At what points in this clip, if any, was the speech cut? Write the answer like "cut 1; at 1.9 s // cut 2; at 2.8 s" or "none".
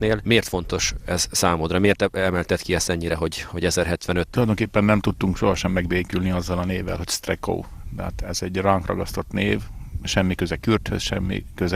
none

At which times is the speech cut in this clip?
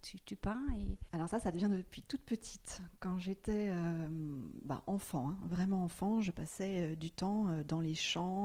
none

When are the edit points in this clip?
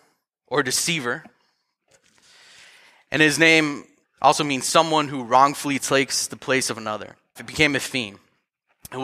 cut 1; at 4.0 s // cut 2; at 7.4 s

